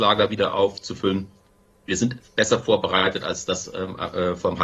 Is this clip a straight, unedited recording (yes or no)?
yes